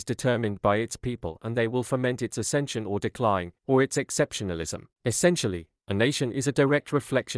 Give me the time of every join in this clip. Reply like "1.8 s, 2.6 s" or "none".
3.6 s, 4.9 s